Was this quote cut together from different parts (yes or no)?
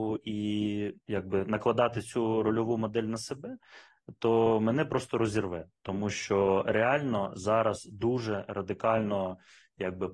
yes